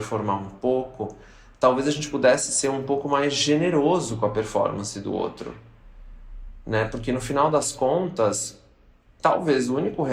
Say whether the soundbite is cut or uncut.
uncut